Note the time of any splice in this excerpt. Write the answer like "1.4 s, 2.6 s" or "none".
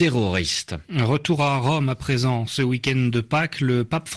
none